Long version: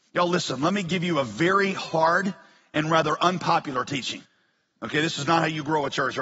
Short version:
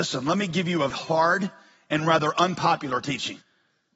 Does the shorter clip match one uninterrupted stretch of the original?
no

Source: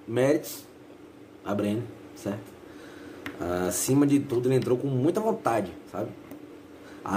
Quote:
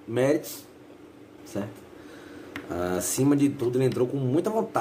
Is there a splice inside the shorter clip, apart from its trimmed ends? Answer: yes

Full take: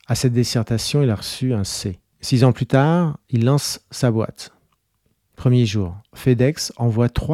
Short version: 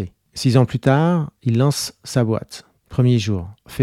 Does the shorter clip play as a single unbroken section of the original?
no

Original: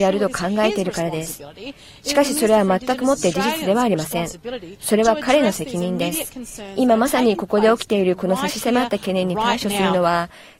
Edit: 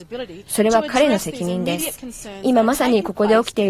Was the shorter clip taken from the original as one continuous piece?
yes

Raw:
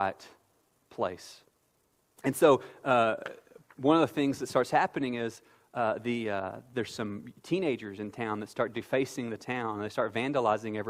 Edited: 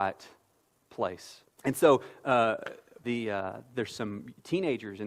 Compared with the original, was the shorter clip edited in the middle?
yes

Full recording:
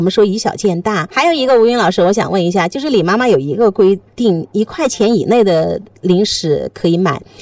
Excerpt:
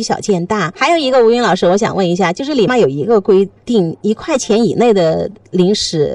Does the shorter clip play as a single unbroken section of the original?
no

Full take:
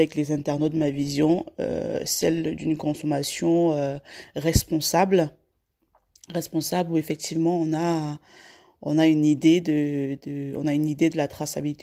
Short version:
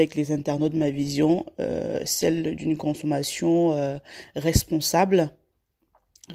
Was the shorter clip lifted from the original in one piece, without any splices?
yes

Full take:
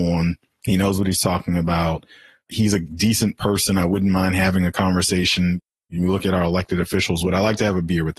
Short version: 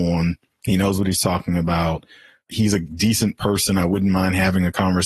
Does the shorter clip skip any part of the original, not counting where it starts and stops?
no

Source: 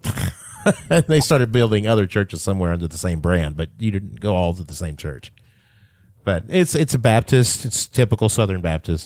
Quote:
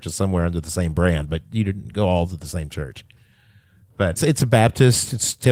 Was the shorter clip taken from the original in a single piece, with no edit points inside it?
no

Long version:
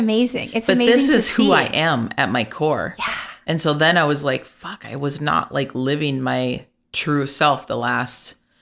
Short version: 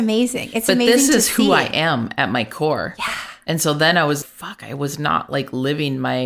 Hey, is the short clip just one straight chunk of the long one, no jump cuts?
no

